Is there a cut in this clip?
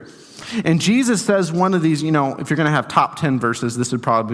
no; 0 cuts

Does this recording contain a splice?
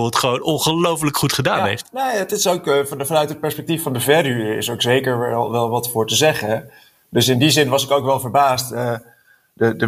no; 0 cuts

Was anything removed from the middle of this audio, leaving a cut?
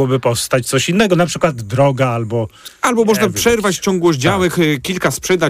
no; 0 cuts

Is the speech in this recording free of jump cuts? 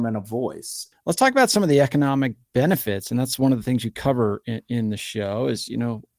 no; 1 cut; at 0.9 s

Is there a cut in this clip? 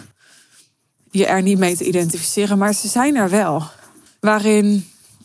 yes; 1 cut; at 4.1 s

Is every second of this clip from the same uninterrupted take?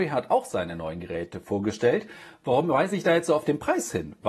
yes; 0 cuts

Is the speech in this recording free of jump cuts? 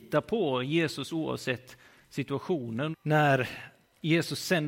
no; 1 cut; at 2.9 s

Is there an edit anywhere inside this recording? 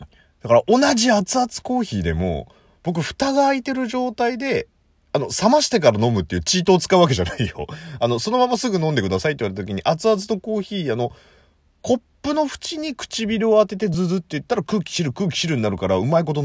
yes; 2 cuts; at 13.9 s, 15.1 s

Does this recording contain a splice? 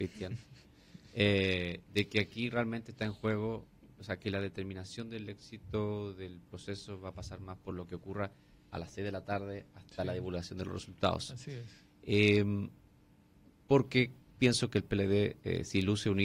no; 0 cuts

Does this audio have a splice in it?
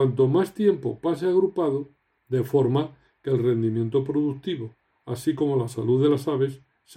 yes; 1 cut; at 2.2 s

